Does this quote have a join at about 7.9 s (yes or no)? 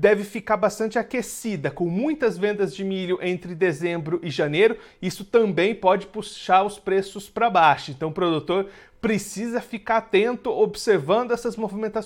no